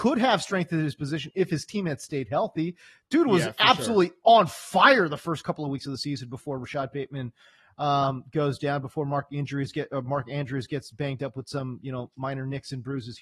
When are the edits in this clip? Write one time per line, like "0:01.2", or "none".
none